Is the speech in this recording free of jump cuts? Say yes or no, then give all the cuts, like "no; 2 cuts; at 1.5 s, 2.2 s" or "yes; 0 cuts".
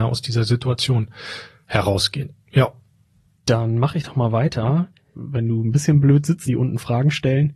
no; 3 cuts; at 3.4 s, 5.1 s, 6.5 s